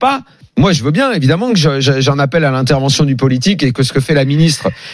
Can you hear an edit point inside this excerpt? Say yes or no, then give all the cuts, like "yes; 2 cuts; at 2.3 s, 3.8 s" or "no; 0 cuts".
no; 0 cuts